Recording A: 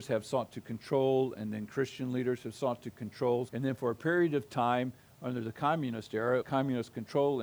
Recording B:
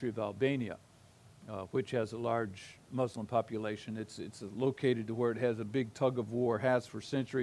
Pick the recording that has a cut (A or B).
A